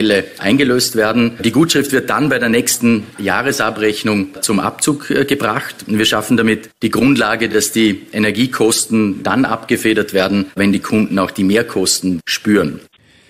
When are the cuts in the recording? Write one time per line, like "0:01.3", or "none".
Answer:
none